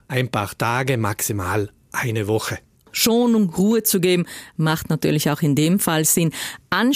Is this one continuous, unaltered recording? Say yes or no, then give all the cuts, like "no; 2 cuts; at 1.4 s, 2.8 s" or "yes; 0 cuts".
yes; 0 cuts